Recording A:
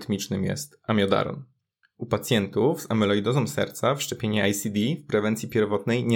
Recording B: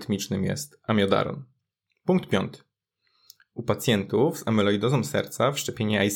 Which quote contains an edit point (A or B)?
A